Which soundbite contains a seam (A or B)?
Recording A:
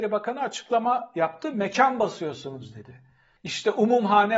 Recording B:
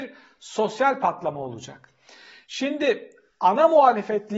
A